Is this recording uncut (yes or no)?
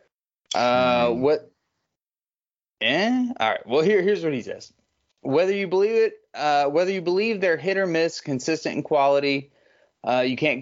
yes